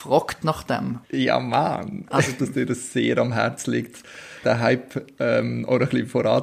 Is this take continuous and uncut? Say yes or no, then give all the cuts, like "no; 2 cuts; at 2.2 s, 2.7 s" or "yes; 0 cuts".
no; 3 cuts; at 1.0 s, 2.4 s, 4.4 s